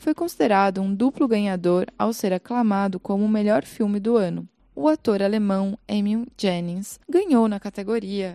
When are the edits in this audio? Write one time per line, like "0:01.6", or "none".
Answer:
0:04.6
0:07.0